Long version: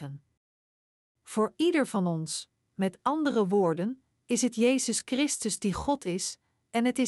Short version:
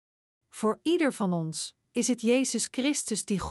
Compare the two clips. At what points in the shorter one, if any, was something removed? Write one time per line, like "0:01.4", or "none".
0:01.8